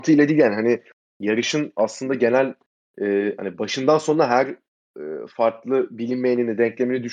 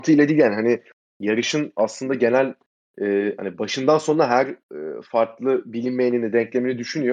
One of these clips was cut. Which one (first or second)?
second